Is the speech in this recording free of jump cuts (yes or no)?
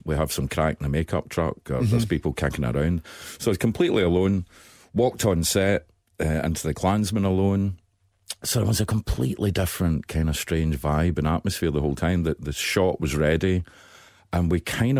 yes